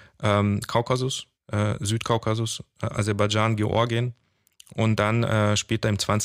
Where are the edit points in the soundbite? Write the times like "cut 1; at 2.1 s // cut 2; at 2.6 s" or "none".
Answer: cut 1; at 1.3 s